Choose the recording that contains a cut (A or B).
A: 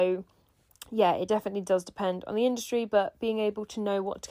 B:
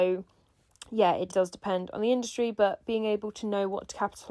B